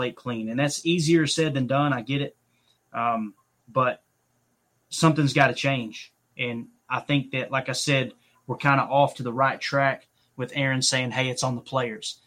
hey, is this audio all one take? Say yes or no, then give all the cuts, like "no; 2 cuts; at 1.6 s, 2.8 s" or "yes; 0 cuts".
yes; 0 cuts